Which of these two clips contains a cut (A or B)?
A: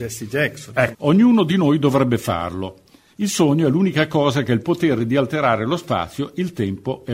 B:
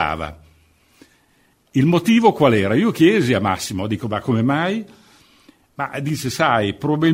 A